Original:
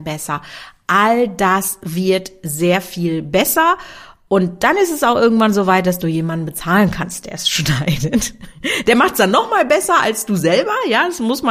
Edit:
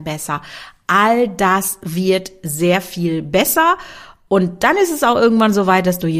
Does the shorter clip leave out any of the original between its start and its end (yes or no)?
no